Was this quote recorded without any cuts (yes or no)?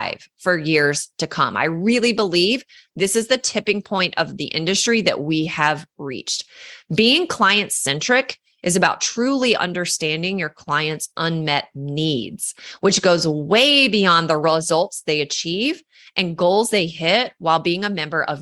yes